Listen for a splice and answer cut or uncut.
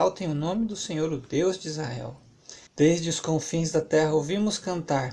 cut